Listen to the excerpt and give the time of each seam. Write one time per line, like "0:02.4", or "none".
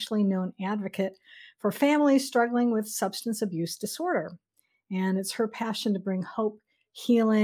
none